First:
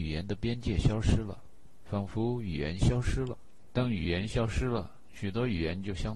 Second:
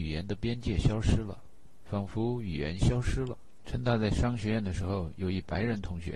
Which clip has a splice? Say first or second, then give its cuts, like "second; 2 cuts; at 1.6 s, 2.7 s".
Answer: second; 1 cut; at 3.6 s